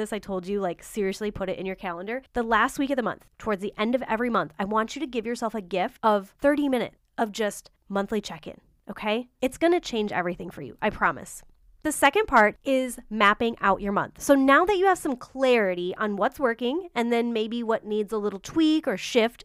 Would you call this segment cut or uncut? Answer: uncut